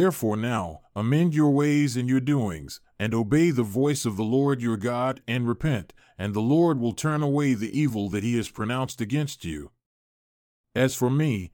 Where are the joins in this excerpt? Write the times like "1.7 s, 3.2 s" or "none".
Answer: none